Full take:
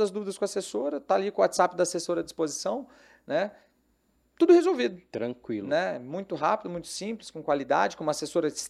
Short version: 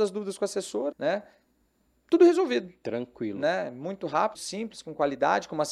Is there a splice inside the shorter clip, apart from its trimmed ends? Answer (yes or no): yes